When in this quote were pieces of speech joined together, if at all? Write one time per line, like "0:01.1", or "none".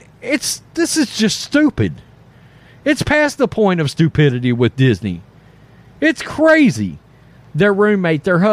0:07.4